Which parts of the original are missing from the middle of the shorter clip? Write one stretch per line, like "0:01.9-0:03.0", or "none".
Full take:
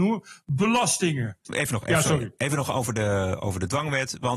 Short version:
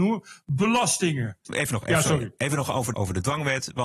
0:02.9-0:03.4